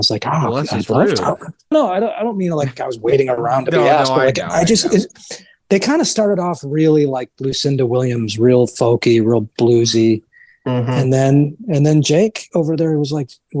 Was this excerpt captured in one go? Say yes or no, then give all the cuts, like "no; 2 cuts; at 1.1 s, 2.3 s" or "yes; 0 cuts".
no; 1 cut; at 1.7 s